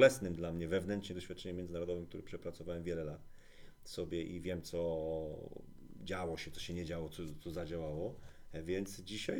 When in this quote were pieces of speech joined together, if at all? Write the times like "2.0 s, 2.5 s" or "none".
none